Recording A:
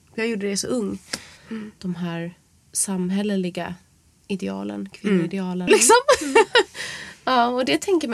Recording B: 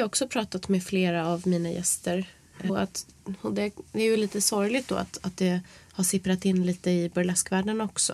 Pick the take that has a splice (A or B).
A